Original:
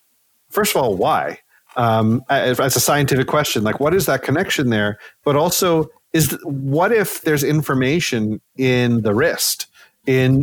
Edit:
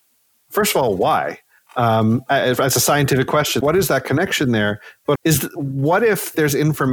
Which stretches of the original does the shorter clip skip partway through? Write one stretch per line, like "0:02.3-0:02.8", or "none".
0:03.6-0:03.8
0:05.3-0:06.0